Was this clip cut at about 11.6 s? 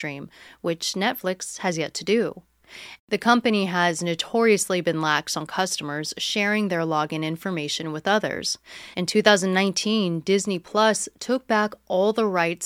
no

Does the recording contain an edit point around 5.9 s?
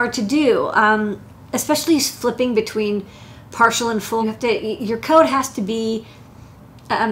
no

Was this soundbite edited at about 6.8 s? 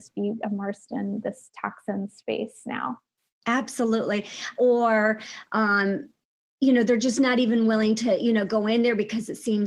no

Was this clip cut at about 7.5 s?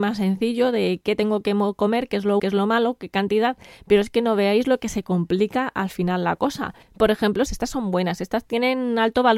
yes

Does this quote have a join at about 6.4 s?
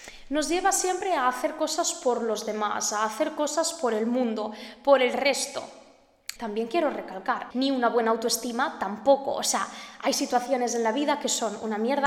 yes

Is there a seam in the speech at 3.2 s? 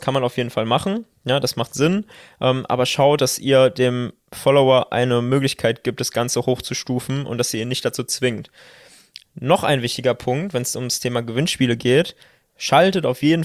no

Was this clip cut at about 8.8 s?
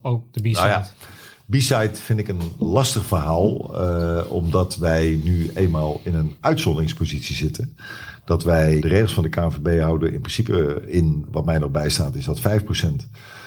yes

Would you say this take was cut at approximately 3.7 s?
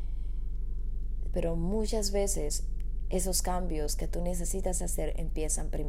no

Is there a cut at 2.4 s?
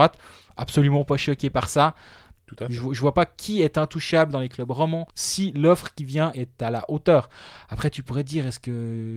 yes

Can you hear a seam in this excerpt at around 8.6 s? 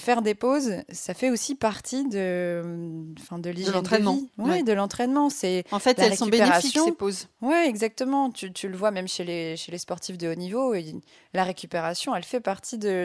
no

